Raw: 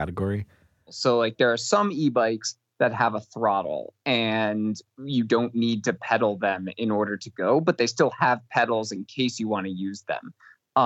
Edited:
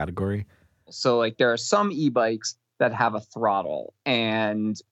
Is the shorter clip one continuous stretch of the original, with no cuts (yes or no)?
yes